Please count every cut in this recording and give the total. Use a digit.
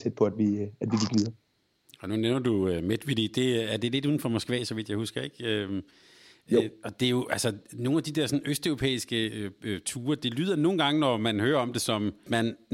0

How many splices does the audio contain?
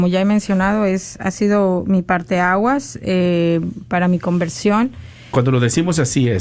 1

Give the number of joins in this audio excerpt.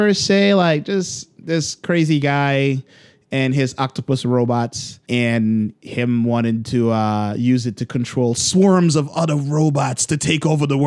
1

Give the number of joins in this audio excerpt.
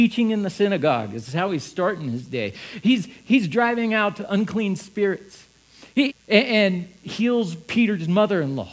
1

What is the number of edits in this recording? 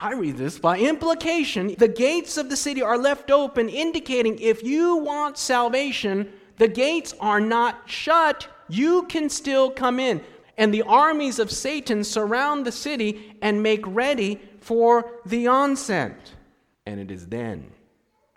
3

